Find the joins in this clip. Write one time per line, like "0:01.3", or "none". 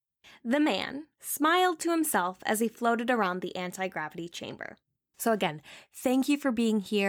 0:01.1
0:05.1